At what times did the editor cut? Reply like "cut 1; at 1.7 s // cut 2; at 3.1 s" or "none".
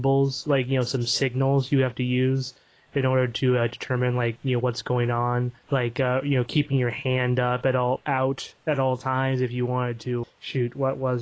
cut 1; at 5.6 s // cut 2; at 8.0 s // cut 3; at 10.2 s